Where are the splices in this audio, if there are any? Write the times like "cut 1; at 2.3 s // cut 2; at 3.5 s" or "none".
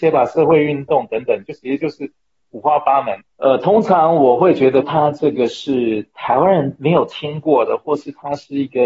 cut 1; at 3.2 s // cut 2; at 4.8 s